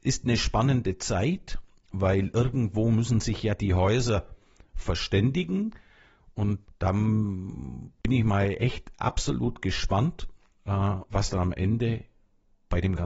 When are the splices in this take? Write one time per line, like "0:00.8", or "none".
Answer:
0:06.6